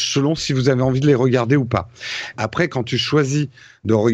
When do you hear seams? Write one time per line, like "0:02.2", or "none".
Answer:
0:02.3